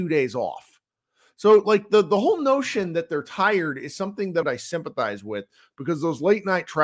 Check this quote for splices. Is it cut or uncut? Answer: cut